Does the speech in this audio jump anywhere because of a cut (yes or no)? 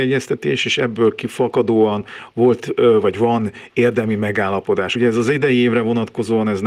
no